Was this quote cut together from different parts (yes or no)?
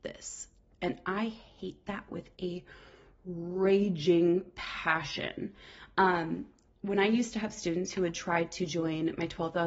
no